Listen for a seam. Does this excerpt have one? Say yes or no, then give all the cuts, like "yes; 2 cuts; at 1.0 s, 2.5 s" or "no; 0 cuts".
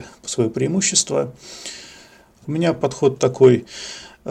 yes; 1 cut; at 2.4 s